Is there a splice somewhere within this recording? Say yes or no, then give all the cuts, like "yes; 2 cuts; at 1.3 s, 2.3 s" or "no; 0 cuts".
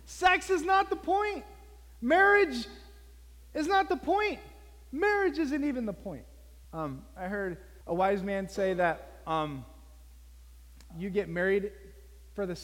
yes; 3 cuts; at 6.6 s, 7.8 s, 10.9 s